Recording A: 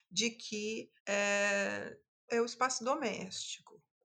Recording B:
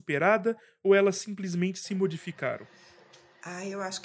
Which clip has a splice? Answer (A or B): A